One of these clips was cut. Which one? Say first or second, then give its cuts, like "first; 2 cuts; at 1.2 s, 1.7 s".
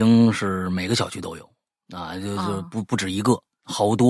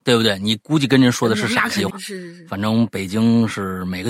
second; 1 cut; at 1.9 s